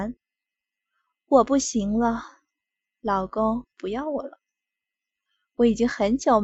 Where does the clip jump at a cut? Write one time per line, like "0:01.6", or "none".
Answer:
none